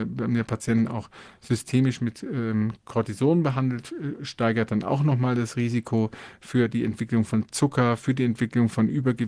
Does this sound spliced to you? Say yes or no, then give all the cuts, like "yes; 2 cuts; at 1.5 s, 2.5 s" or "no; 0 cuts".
no; 0 cuts